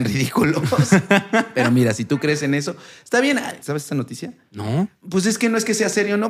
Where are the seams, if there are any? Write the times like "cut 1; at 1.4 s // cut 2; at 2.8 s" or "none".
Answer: cut 1; at 3.6 s // cut 2; at 5.0 s